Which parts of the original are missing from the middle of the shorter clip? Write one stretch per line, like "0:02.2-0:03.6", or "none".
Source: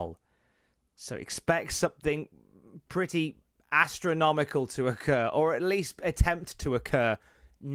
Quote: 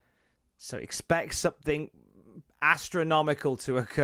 0:02.9-0:03.6